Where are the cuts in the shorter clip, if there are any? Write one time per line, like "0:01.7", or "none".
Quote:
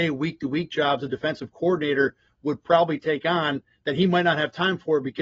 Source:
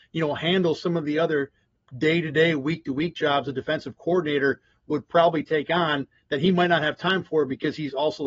none